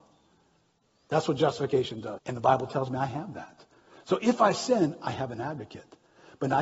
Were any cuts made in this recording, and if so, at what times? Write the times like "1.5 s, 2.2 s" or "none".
2.2 s